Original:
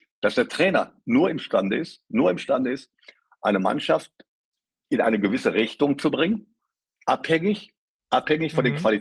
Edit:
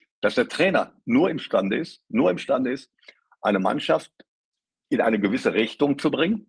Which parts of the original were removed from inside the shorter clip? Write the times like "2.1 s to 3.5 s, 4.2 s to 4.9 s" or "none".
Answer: none